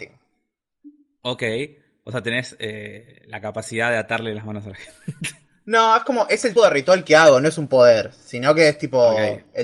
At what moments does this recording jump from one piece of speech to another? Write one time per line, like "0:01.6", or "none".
0:06.6